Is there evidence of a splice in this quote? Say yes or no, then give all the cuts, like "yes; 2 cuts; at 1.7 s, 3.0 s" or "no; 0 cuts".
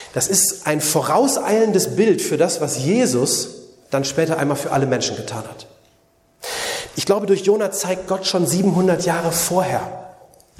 yes; 1 cut; at 6.9 s